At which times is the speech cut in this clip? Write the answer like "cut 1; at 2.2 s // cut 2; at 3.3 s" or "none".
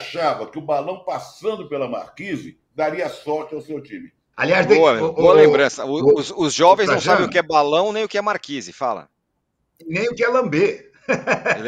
cut 1; at 4.3 s